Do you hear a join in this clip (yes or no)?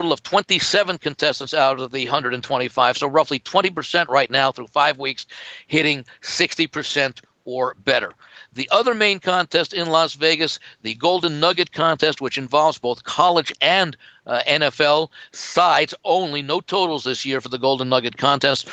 no